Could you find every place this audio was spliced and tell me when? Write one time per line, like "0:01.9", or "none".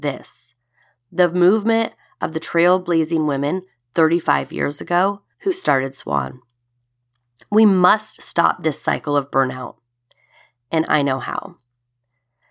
0:05.3